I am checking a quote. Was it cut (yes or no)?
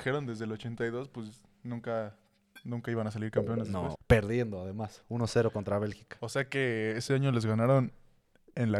yes